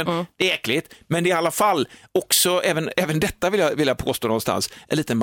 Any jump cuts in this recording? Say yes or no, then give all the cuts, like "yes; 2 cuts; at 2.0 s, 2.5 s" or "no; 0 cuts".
no; 0 cuts